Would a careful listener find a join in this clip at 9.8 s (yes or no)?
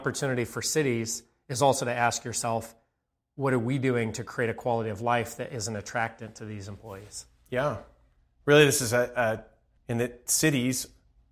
yes